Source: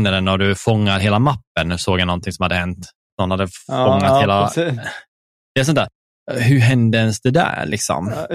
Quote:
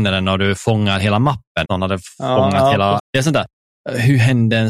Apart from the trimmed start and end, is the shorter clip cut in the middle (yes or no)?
yes